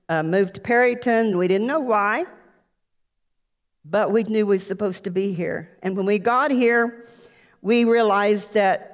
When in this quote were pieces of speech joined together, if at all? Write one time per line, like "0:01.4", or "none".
0:01.3
0:04.2